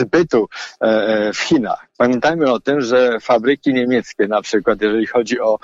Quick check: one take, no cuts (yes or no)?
yes